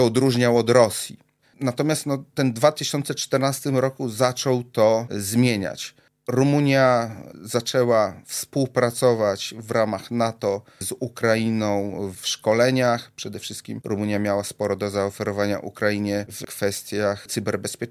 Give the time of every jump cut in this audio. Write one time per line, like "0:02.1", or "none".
0:01.4